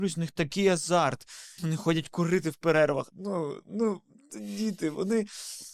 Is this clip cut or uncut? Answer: cut